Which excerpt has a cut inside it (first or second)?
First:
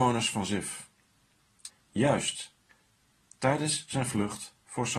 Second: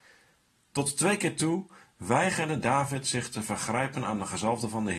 first